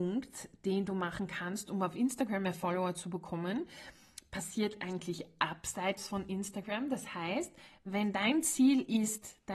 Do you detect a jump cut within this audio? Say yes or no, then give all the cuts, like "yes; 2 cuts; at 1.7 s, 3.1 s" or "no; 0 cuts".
no; 0 cuts